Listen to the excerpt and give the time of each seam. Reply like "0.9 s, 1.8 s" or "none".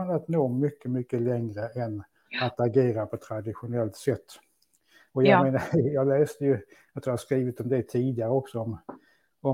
none